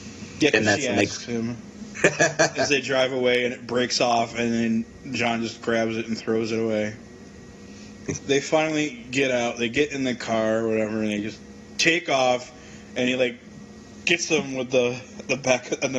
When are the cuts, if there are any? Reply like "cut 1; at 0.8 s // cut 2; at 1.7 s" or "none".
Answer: cut 1; at 1.9 s // cut 2; at 8.2 s